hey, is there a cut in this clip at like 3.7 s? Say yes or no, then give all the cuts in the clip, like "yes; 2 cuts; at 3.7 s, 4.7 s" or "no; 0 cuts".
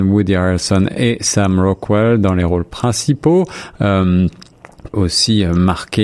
yes; 2 cuts; at 3.7 s, 4.9 s